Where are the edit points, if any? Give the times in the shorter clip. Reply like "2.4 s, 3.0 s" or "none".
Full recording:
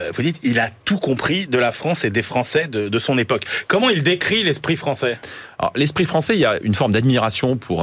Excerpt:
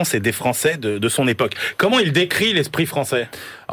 none